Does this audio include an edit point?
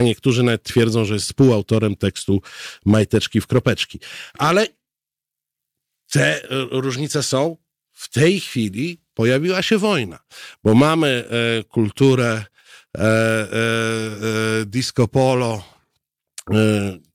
no; 0 cuts

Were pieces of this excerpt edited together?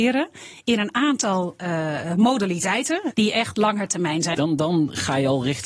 yes; 2 cuts; at 3.1 s, 4.3 s

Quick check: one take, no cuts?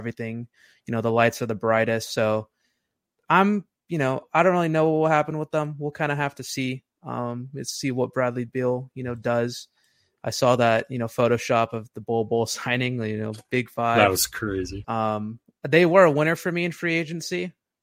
no; 1 cut; at 14.8 s

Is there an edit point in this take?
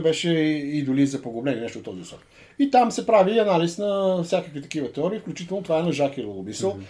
no; 0 cuts

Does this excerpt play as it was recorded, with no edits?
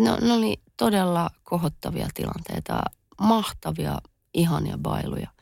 yes; 0 cuts

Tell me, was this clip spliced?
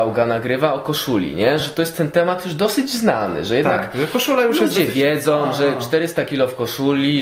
no; 0 cuts

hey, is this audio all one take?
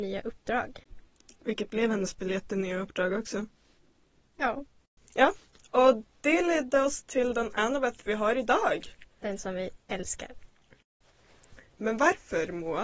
yes; 0 cuts

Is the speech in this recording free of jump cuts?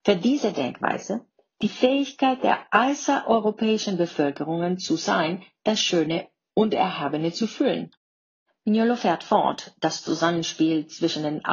no; 1 cut; at 8.5 s

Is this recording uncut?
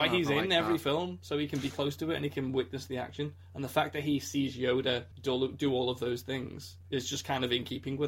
no; 2 cuts; at 5.1 s, 6.8 s

